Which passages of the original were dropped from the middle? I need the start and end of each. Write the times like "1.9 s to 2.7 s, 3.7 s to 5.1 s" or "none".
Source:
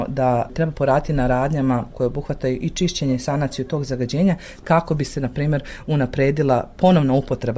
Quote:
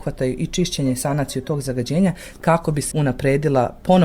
5.1 s to 5.9 s